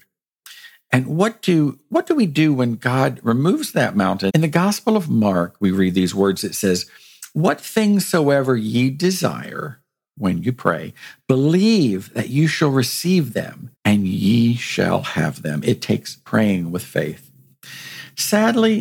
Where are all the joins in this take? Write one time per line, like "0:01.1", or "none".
0:04.3
0:13.8

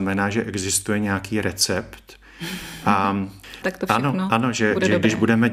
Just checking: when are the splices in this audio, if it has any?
0:03.6

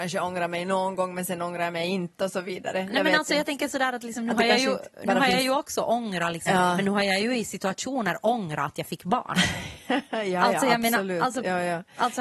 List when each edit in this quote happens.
0:06.5

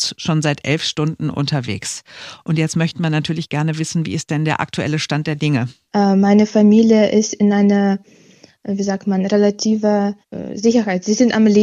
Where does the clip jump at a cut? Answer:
0:05.9
0:10.2

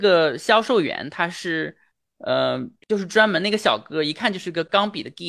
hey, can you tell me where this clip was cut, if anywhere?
0:02.8

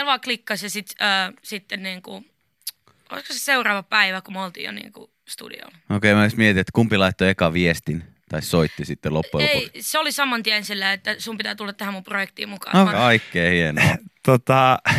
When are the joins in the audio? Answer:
0:01.4
0:12.9

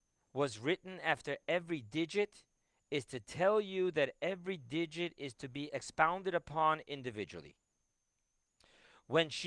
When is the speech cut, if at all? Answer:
0:05.7

